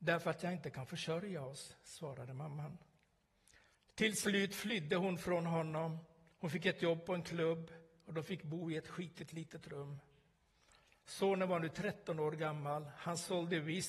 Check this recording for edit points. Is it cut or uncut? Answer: uncut